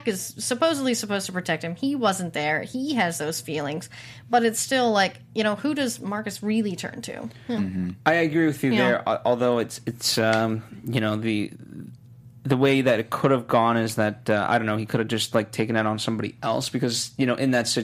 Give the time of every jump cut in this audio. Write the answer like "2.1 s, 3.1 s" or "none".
none